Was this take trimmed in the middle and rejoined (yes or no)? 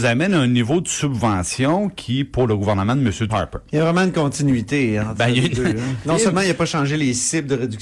yes